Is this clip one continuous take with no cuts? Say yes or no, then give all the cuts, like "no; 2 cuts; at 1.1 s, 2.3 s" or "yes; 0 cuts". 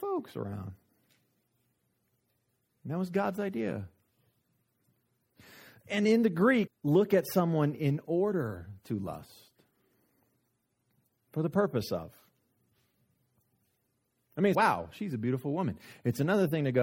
no; 2 cuts; at 6.7 s, 14.5 s